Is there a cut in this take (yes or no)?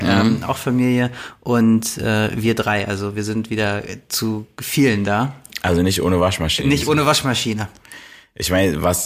no